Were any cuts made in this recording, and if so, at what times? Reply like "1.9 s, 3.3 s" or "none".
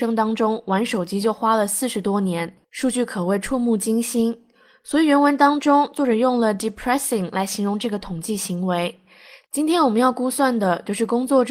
none